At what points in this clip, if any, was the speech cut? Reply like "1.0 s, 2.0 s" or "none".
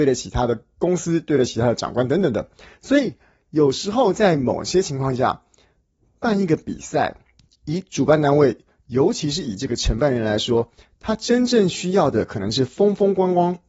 none